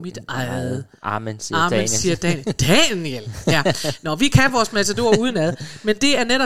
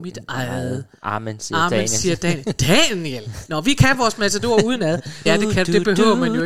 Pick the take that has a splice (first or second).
second